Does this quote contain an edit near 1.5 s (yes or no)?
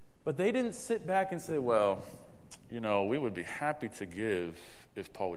no